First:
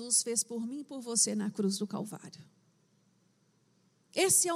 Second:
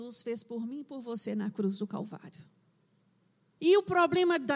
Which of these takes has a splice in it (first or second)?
second